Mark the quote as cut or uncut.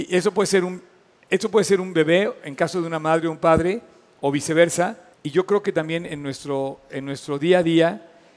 cut